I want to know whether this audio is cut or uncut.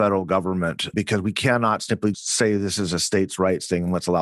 cut